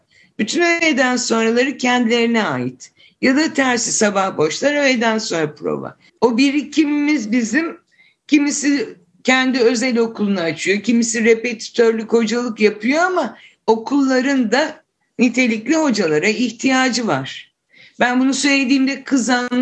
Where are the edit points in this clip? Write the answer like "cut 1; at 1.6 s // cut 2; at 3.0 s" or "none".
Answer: cut 1; at 6.1 s